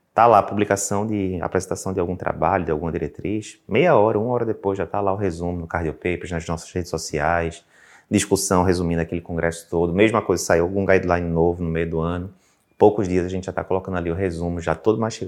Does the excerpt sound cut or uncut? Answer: uncut